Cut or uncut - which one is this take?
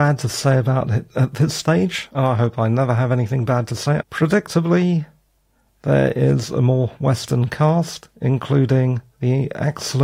cut